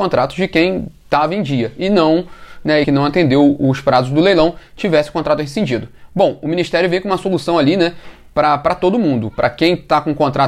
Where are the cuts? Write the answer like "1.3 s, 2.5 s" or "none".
2.8 s